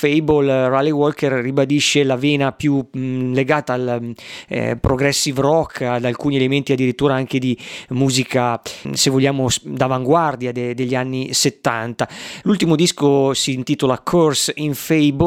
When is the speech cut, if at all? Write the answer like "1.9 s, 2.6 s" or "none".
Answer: 8.8 s, 12.4 s